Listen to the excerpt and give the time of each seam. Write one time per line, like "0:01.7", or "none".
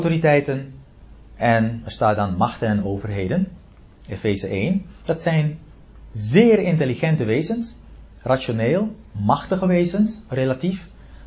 none